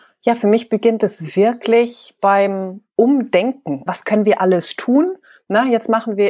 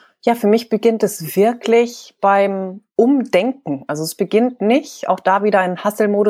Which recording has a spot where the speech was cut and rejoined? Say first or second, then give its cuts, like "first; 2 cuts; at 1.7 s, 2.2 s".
first; 1 cut; at 3.9 s